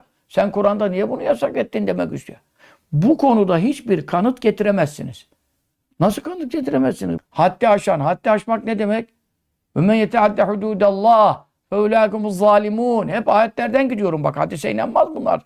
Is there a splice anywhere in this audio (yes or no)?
yes